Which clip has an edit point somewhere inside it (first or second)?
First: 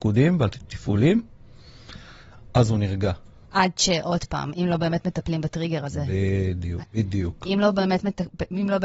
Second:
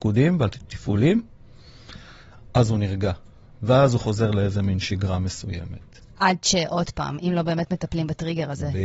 first